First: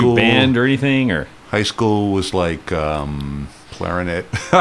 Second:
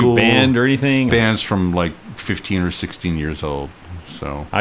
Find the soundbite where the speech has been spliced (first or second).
second